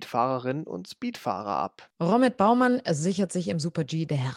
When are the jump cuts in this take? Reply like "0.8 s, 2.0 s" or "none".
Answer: none